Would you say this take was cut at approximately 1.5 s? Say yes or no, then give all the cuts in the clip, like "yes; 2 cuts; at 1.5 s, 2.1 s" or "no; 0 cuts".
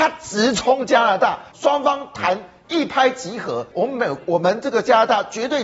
yes; 2 cuts; at 1.5 s, 3.7 s